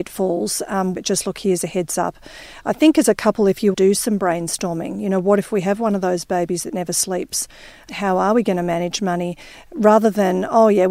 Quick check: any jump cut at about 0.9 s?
yes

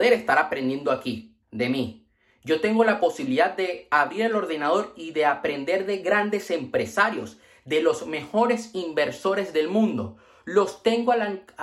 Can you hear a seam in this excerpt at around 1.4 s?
yes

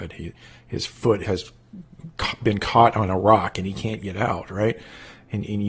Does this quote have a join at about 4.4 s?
no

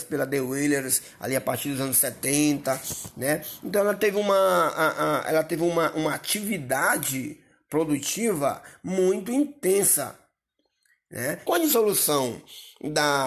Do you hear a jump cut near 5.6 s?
no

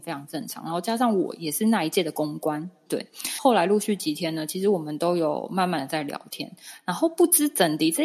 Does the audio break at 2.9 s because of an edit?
yes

